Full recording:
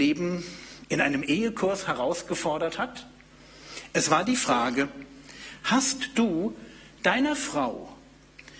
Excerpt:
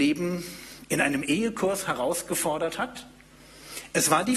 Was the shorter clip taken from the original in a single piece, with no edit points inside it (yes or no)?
yes